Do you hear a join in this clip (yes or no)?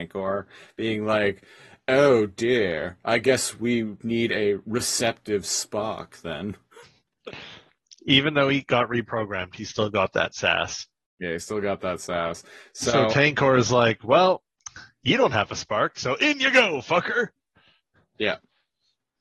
no